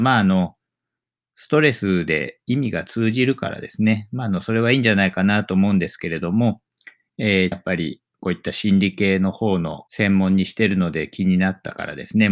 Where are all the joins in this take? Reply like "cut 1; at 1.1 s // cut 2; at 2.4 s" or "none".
cut 1; at 7.5 s // cut 2; at 9.9 s